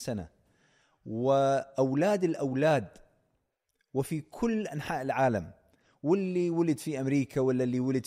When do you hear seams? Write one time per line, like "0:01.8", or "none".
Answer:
none